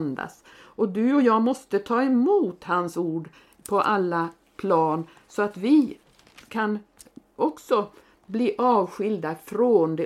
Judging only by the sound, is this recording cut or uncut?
uncut